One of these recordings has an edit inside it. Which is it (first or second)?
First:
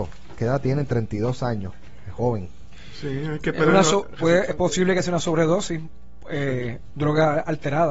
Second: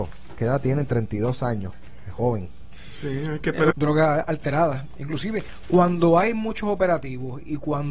second